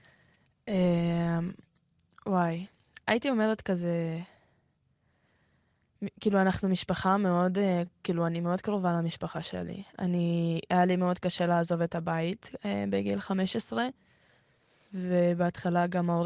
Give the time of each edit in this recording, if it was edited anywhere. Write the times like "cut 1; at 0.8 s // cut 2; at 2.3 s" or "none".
none

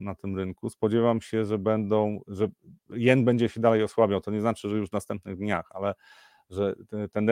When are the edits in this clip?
none

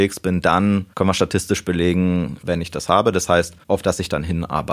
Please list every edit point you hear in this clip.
cut 1; at 0.9 s // cut 2; at 2.4 s // cut 3; at 3.6 s

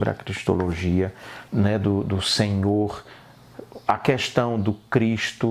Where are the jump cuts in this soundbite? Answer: cut 1; at 1.5 s

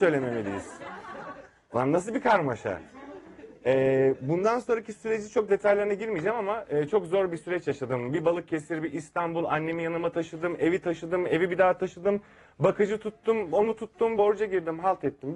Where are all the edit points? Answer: cut 1; at 14.2 s

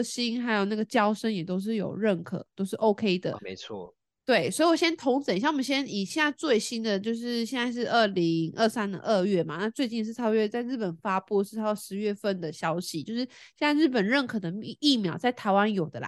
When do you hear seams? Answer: cut 1; at 3.4 s

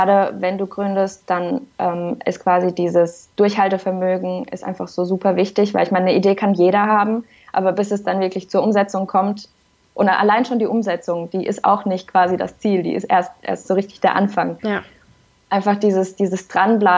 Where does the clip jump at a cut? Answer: cut 1; at 13.6 s

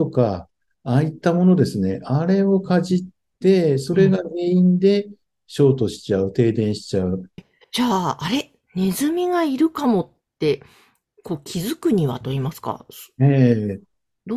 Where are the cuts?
cut 1; at 7.4 s

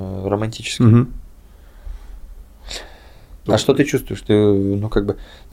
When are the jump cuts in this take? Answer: cut 1; at 3.5 s

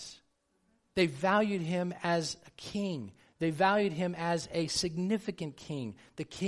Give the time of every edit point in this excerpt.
none

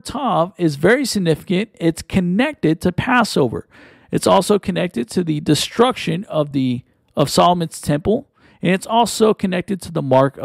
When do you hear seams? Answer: none

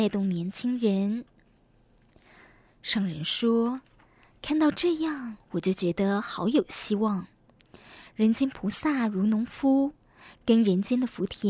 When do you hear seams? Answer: none

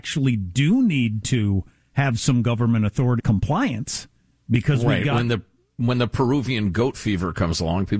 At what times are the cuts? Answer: cut 1; at 3.2 s

